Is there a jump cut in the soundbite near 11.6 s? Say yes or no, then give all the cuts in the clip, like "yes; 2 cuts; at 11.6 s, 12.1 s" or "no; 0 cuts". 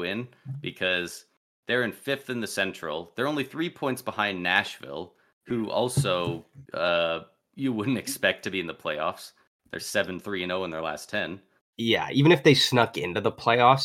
yes; 2 cuts; at 6.6 s, 11.6 s